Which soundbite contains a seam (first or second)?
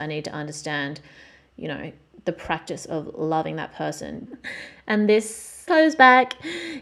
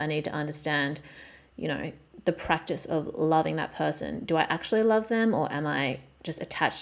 first